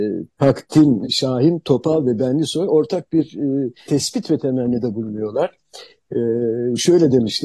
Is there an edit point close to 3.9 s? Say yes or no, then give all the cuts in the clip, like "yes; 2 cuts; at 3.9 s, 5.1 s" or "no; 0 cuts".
yes; 2 cuts; at 1.0 s, 3.9 s